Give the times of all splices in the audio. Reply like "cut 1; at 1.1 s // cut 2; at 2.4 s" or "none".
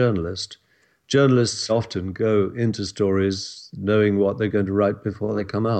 cut 1; at 1.7 s